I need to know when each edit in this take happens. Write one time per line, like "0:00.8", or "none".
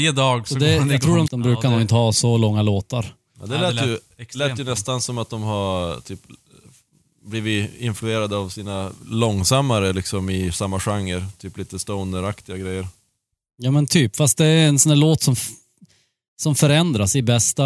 0:01.3